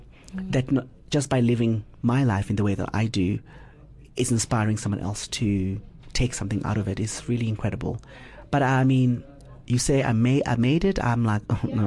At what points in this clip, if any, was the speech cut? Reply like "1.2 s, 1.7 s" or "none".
none